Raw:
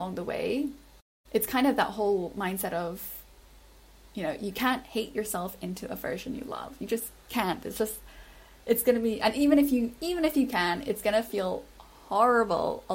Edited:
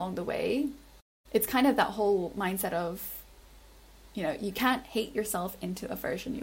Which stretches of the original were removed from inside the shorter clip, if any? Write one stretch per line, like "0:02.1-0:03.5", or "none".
none